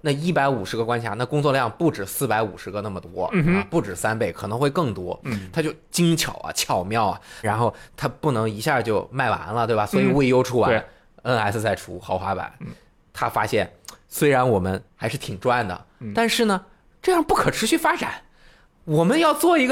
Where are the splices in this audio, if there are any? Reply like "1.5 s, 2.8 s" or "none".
7.4 s, 14.9 s